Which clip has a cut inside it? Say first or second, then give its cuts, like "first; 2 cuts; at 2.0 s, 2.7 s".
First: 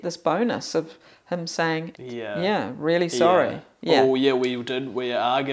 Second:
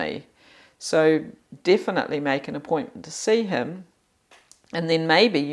first; 1 cut; at 1.9 s